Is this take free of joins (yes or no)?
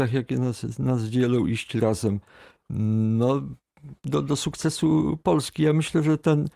yes